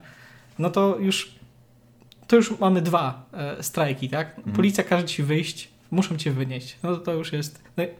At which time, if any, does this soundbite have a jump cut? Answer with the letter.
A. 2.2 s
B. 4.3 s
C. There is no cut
C